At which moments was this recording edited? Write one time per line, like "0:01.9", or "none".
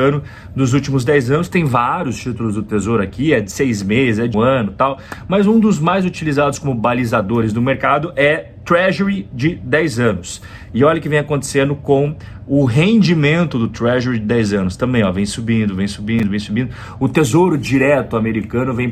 0:04.3